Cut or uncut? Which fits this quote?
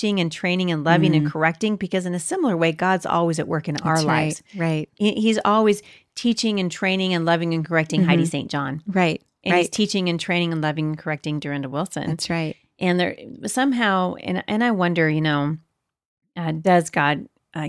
uncut